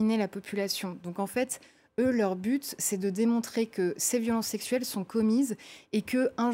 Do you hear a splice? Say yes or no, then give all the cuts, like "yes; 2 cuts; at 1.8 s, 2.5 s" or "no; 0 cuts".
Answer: no; 0 cuts